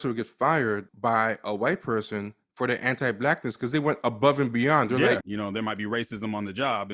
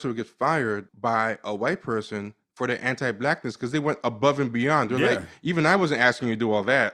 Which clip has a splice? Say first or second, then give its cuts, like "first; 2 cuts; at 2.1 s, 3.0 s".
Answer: first; 1 cut; at 5.2 s